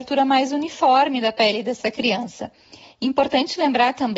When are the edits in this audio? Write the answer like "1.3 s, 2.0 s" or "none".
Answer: none